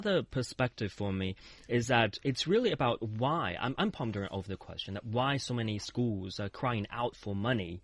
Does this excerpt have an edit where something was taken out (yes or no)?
no